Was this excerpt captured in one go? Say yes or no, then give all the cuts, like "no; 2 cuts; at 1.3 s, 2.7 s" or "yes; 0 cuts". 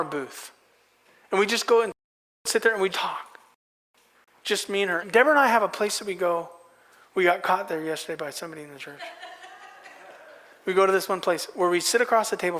no; 2 cuts; at 2.9 s, 5.0 s